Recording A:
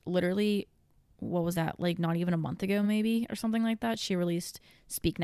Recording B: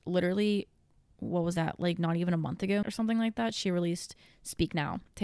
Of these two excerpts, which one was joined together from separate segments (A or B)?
B